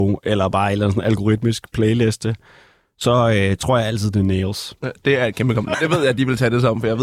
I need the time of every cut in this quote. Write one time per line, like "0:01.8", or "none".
0:05.7